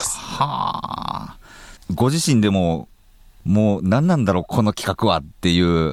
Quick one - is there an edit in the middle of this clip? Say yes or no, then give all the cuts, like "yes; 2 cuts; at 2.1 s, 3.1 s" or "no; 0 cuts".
no; 0 cuts